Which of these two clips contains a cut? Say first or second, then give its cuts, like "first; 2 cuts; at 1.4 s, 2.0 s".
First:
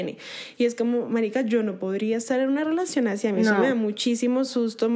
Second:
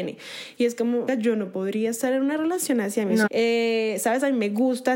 second; 2 cuts; at 1.1 s, 3.3 s